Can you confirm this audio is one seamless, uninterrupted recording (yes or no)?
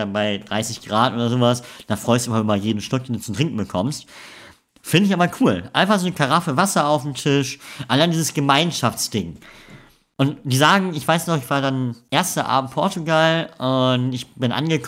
yes